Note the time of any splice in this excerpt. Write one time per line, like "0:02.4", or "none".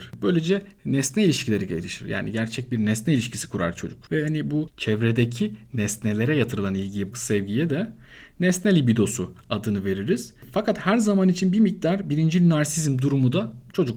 0:07.1